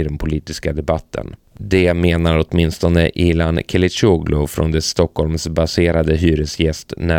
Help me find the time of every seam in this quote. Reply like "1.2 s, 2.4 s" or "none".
none